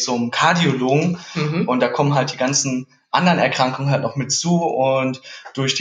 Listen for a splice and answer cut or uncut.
uncut